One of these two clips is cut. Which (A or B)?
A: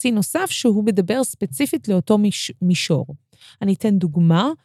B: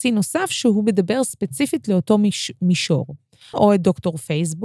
B